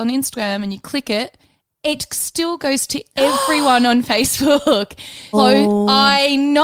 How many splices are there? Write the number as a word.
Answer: one